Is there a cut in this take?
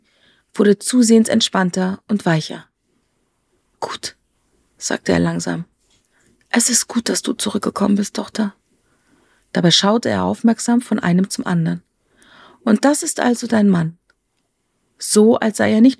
no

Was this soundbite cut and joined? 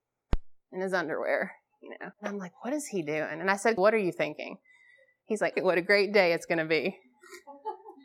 yes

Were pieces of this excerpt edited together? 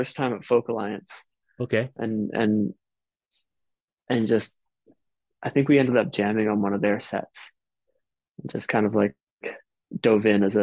no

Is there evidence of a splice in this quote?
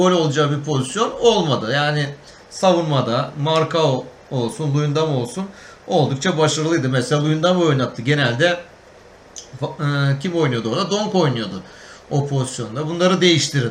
no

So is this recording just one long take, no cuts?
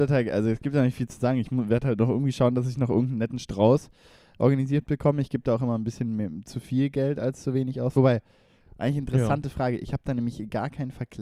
yes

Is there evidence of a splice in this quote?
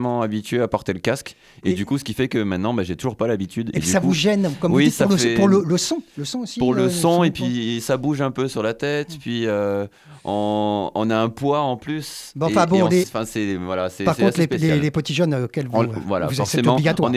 yes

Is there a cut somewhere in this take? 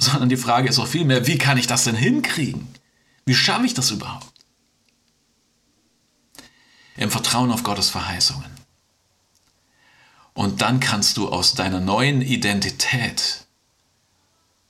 yes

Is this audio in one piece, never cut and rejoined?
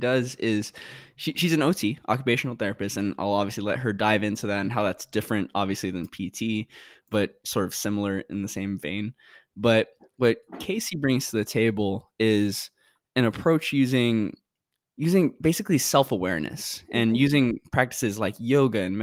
yes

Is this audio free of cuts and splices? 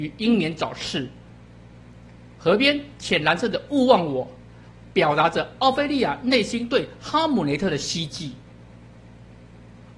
yes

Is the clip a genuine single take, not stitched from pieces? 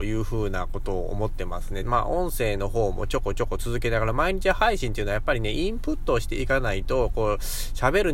no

